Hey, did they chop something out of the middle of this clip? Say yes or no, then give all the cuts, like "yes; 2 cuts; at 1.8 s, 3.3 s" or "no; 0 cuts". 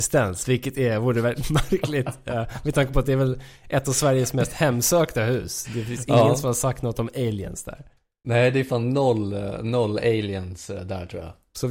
no; 0 cuts